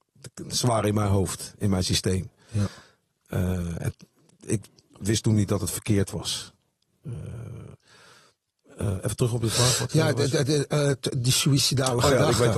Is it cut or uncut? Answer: uncut